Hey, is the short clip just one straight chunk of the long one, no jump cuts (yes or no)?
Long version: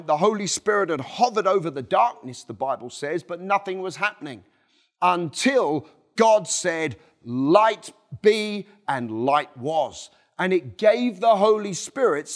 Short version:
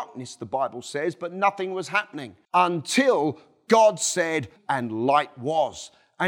no